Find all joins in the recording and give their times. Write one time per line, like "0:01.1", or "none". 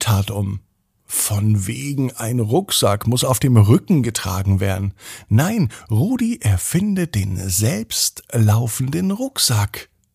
none